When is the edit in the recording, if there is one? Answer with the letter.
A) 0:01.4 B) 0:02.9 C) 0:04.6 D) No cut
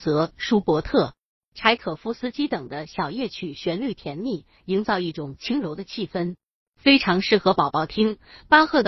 C